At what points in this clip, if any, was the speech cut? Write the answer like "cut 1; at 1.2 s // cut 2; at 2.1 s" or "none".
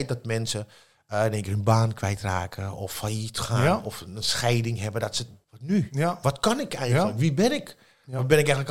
cut 1; at 5.4 s